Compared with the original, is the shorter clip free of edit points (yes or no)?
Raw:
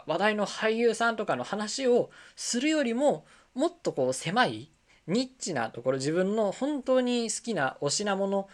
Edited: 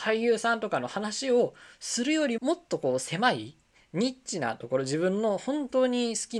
no